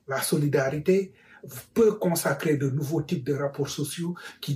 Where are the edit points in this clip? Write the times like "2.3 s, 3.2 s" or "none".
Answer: none